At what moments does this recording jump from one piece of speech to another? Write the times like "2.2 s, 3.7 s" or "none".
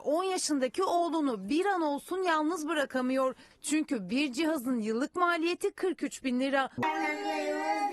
3.5 s, 6.8 s